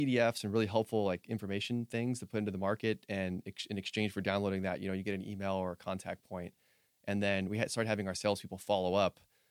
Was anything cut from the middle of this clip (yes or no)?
no